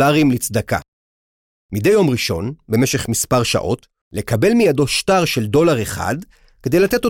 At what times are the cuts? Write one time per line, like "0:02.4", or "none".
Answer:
0:04.0